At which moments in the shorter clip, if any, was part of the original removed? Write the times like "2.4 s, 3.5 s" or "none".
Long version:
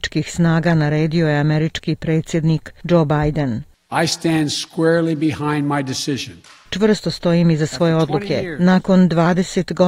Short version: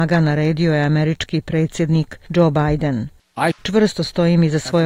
3.5 s